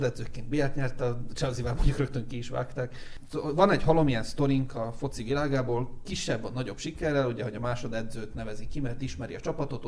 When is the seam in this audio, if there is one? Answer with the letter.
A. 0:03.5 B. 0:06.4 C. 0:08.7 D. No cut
D